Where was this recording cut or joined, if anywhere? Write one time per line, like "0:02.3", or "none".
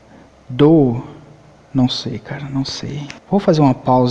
0:03.2